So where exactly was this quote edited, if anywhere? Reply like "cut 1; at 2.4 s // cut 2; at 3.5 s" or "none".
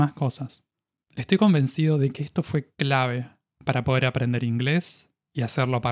cut 1; at 0.9 s